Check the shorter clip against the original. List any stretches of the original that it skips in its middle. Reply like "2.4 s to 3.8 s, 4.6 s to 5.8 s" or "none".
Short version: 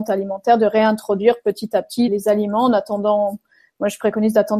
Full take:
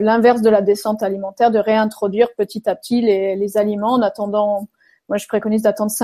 3.0 s to 3.4 s